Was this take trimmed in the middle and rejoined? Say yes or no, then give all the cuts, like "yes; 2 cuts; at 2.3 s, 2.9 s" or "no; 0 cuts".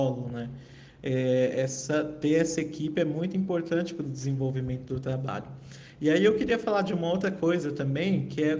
no; 0 cuts